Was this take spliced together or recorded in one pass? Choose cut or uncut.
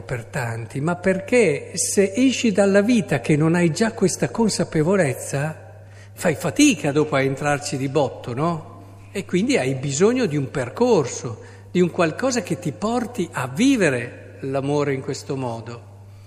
cut